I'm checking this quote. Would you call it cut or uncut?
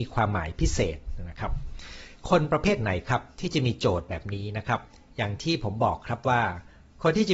uncut